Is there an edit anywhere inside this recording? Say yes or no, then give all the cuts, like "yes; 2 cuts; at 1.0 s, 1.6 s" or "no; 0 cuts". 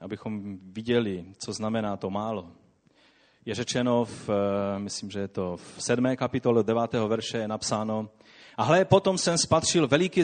no; 0 cuts